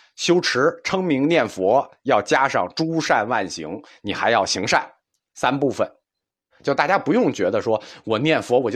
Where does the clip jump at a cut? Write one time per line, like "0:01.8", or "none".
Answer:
0:03.9
0:06.5